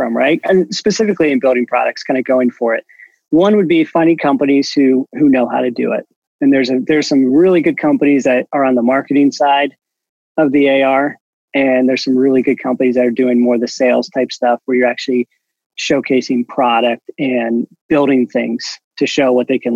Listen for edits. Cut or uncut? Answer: uncut